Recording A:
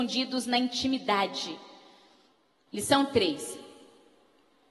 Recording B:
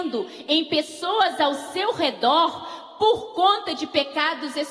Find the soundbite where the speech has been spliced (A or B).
A